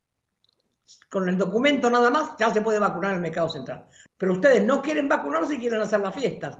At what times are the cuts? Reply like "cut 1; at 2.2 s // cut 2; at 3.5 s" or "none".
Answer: cut 1; at 4.1 s